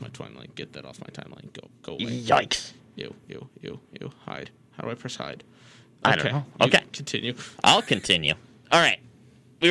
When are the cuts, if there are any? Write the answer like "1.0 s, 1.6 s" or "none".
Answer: 3.2 s